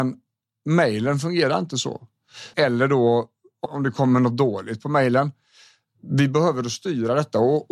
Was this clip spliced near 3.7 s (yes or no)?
yes